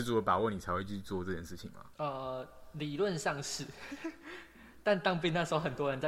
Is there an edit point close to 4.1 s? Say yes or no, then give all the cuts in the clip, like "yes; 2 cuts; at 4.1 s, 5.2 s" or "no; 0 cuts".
no; 1 cut; at 1.9 s